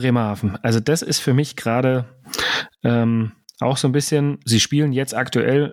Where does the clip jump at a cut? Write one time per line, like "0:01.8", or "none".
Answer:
0:04.4